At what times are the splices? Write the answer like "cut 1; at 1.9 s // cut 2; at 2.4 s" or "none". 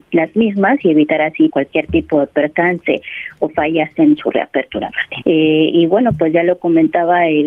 cut 1; at 1.5 s // cut 2; at 5.2 s